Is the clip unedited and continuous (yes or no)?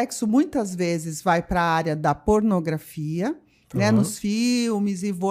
yes